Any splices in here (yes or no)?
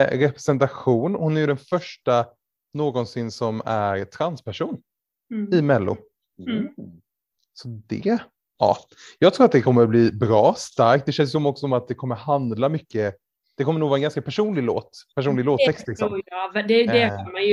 no